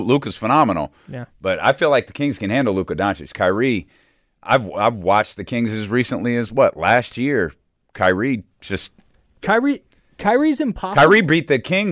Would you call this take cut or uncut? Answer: uncut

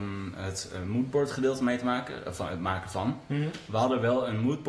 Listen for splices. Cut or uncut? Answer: uncut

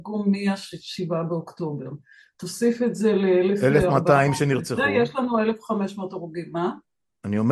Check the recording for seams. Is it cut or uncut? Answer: uncut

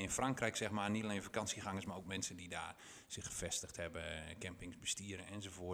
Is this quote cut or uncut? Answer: uncut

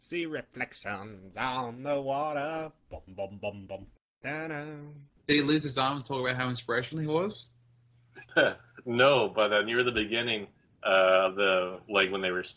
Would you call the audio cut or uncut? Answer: cut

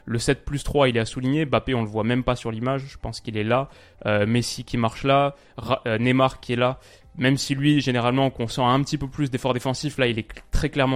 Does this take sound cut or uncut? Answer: uncut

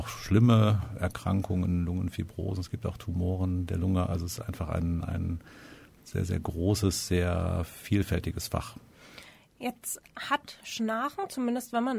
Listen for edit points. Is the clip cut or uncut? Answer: uncut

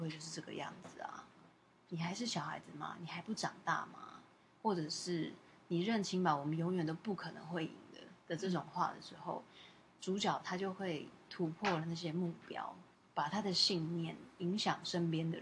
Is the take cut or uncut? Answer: uncut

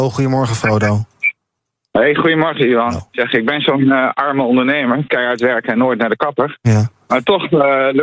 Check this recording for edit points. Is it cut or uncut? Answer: uncut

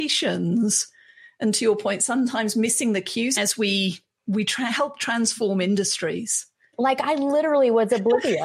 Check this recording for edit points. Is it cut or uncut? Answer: cut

